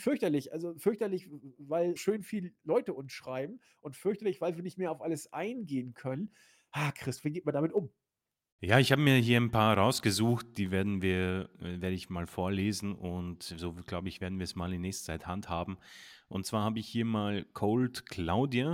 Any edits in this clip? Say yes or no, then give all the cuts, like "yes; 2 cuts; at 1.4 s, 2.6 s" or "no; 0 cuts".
yes; 1 cut; at 2.0 s